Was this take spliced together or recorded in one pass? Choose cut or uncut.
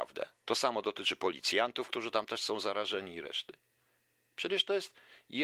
uncut